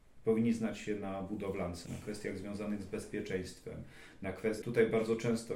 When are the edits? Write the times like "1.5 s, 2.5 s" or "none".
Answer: 1.9 s, 4.6 s